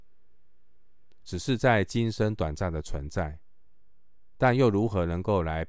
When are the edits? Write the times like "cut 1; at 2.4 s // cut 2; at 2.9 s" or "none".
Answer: cut 1; at 1.2 s